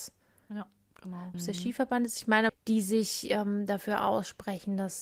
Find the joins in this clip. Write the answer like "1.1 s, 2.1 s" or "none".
1.3 s, 2.5 s